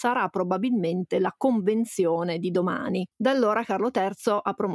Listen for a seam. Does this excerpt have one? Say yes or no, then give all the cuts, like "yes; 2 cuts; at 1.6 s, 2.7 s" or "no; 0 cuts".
yes; 1 cut; at 3.1 s